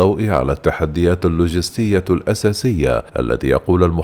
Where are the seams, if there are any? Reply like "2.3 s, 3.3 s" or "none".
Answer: 3.1 s